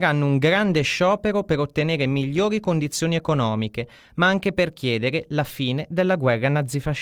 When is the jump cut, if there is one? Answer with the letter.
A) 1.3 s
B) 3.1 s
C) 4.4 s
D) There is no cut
D